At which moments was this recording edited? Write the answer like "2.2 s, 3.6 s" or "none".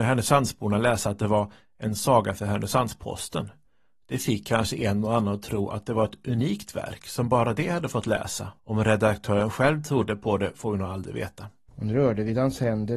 8.6 s, 11.7 s

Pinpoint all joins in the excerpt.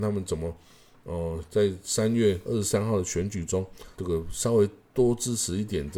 3.9 s

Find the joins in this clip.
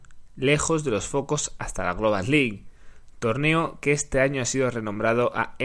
none

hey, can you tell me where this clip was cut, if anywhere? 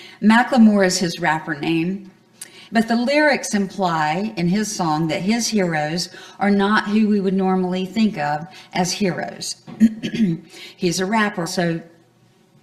2.7 s, 11.5 s

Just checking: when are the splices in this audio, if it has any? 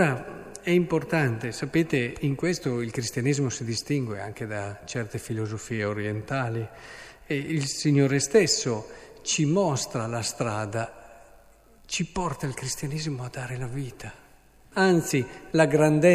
14.7 s

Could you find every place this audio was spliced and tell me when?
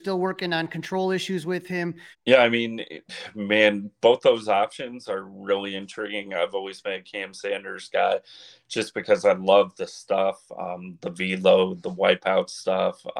2.1 s

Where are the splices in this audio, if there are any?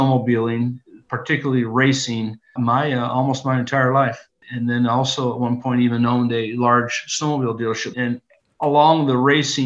2.6 s, 4.4 s, 7.9 s

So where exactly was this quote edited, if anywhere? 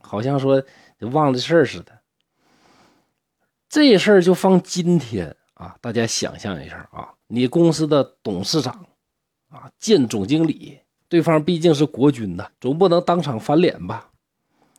7.2 s, 11.0 s, 12.5 s

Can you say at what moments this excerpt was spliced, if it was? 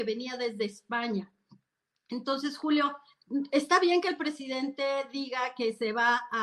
none

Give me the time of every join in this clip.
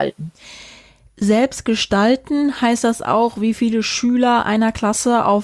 none

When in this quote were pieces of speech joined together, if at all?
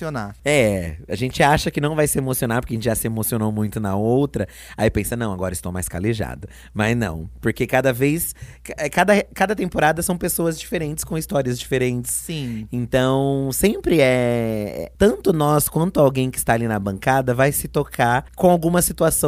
15.0 s

